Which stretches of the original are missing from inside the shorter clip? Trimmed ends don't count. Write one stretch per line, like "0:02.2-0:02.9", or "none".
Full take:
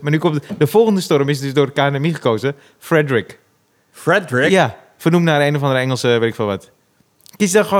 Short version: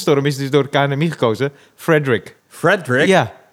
0:03.4-0:03.8